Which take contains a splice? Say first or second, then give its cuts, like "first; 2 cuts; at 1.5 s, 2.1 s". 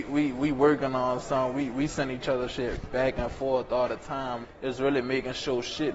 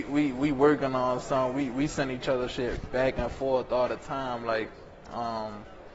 first; 1 cut; at 4.4 s